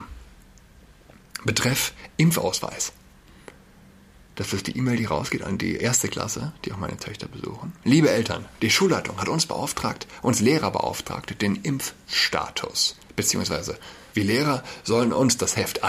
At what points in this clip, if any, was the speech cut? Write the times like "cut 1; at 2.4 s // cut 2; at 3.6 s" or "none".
cut 1; at 5.8 s // cut 2; at 14.1 s